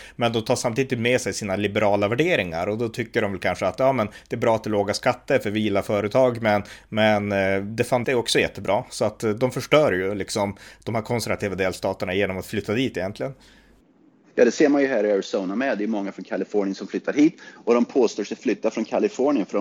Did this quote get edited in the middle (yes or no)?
yes